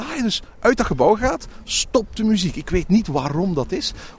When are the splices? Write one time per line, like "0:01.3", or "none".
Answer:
none